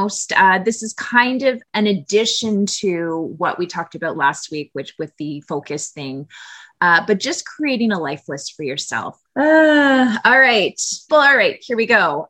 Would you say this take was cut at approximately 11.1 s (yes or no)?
yes